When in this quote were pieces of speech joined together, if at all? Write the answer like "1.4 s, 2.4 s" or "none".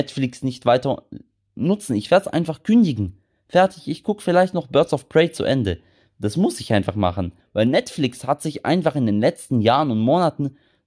7.4 s